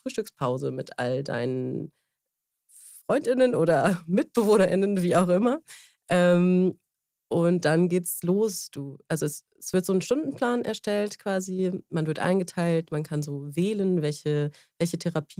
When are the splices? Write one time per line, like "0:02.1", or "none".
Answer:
none